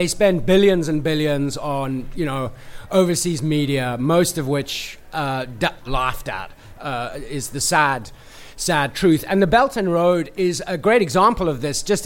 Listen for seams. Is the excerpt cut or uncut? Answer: cut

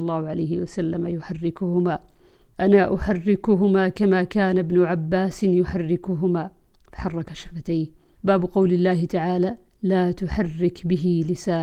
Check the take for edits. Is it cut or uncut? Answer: cut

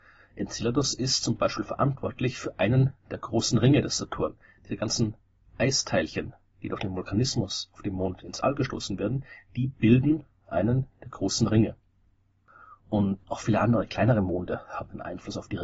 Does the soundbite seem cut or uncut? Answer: cut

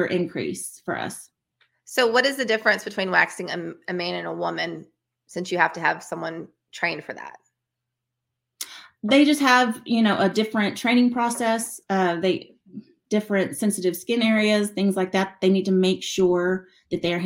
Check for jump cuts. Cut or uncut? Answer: uncut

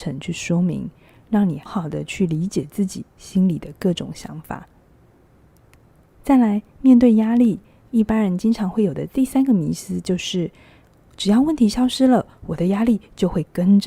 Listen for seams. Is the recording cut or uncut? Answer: cut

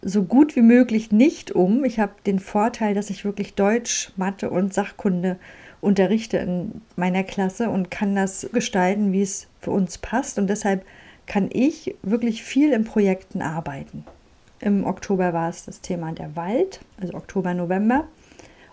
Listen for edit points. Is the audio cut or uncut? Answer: cut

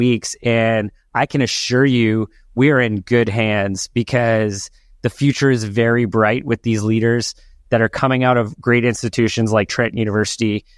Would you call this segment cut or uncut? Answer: uncut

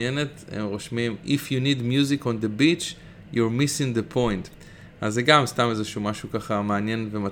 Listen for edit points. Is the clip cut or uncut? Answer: uncut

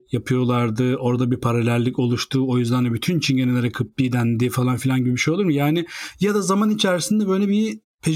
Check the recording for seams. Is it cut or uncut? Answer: uncut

